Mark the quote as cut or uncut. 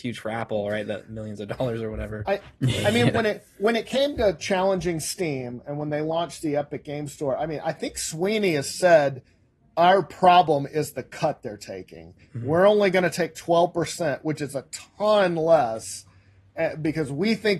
uncut